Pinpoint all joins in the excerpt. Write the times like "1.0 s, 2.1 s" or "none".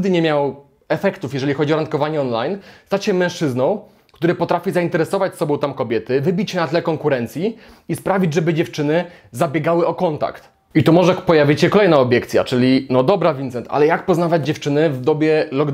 10.7 s